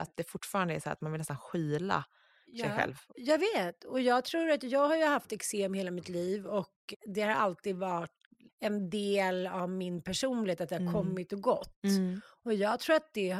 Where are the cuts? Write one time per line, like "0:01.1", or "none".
none